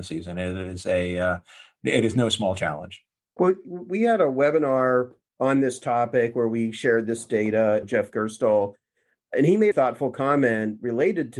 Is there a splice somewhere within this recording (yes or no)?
yes